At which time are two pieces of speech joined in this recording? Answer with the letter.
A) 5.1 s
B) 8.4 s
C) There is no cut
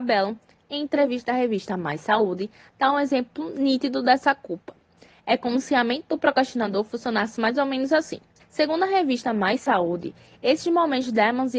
B